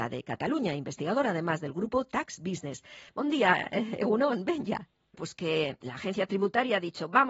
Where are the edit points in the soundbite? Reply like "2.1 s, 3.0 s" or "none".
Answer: 3.1 s, 5.1 s